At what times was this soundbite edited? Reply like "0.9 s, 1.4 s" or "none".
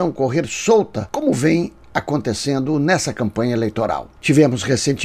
none